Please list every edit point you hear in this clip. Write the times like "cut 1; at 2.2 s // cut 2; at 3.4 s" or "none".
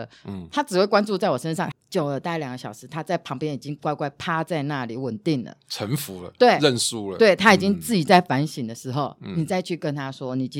cut 1; at 1.7 s